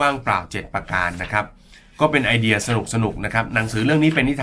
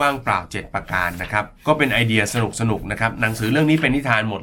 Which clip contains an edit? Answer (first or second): second